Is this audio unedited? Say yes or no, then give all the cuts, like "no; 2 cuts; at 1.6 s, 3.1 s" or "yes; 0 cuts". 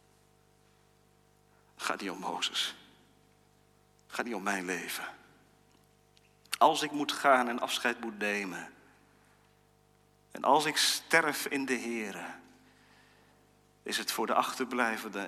yes; 0 cuts